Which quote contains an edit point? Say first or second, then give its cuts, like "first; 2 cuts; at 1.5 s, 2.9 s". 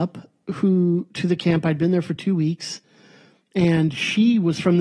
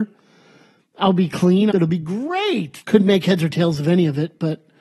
second; 2 cuts; at 1.7 s, 2.8 s